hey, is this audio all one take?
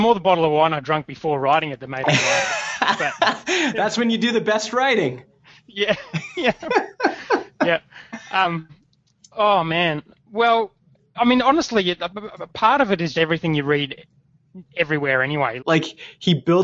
no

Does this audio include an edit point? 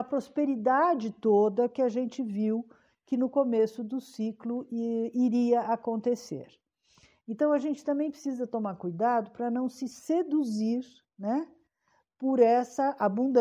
no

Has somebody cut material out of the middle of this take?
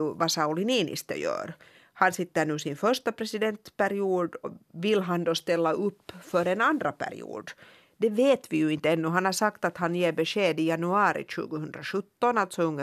yes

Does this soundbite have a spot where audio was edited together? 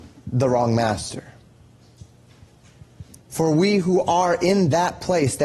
yes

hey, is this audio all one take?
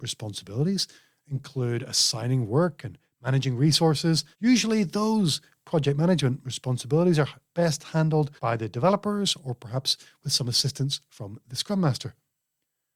no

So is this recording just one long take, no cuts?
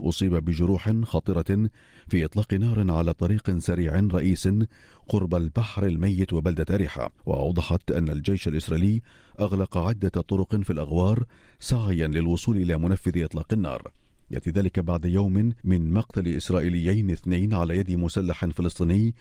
no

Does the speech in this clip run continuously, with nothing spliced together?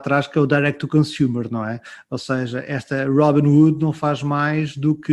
yes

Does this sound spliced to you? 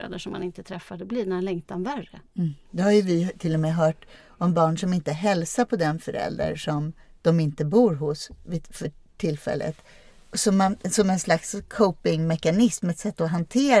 no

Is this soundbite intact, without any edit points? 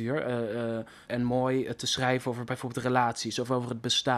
no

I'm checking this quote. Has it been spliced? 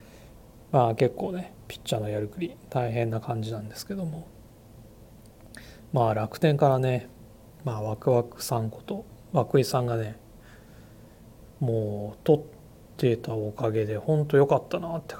no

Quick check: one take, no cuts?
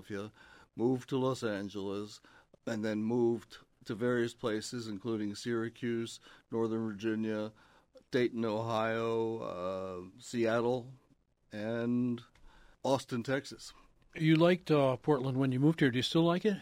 yes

